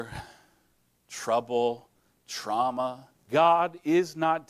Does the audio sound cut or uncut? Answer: cut